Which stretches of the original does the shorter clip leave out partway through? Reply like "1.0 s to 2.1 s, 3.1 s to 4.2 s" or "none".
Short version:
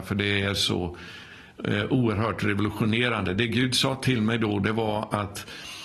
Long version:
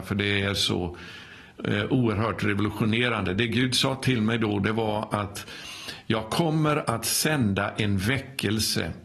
none